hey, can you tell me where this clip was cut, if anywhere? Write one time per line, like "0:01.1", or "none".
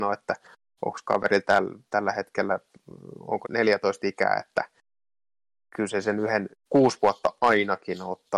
0:03.4
0:06.5